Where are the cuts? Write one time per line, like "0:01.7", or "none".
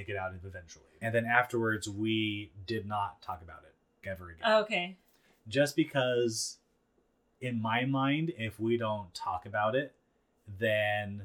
0:01.0
0:04.0